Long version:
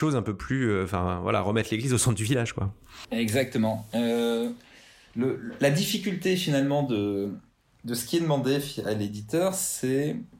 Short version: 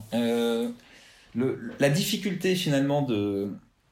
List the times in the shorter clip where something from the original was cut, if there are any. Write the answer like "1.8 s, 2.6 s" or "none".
none